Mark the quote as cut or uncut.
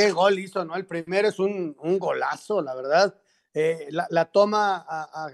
uncut